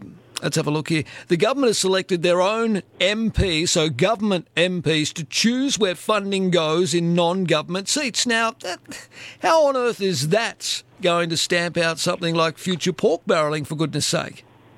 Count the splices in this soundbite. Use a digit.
0